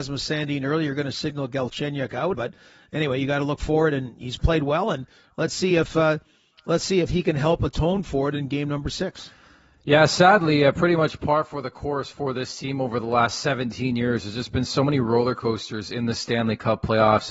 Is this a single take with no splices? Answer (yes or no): no